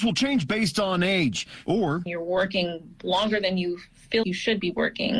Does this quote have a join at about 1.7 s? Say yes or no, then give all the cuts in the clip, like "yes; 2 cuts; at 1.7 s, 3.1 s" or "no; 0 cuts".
yes; 2 cuts; at 1.7 s, 4.2 s